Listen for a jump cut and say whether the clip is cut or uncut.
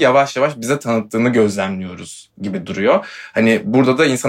uncut